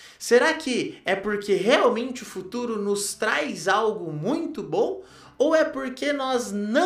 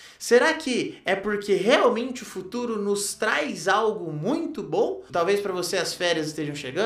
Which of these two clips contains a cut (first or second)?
second